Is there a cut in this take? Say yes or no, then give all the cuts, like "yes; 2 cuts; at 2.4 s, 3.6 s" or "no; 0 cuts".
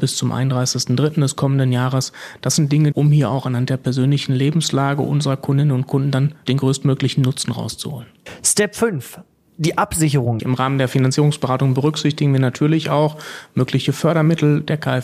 yes; 2 cuts; at 2.9 s, 10.4 s